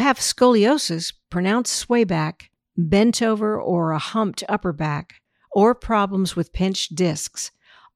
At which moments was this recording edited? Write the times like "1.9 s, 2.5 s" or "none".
none